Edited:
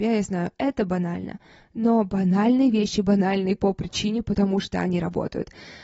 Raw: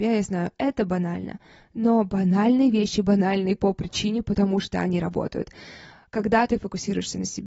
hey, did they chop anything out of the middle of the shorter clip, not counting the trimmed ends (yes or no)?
no